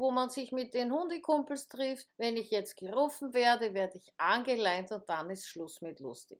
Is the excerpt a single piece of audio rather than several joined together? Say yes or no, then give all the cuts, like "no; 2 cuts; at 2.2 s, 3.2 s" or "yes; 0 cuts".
no; 1 cut; at 2.1 s